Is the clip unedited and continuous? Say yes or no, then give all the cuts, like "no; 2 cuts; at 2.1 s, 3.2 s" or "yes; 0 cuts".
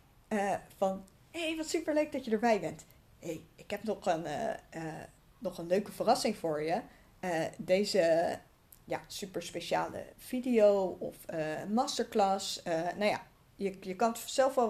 yes; 0 cuts